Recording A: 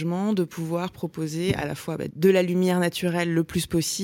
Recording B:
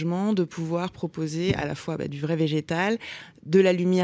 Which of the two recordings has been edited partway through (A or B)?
A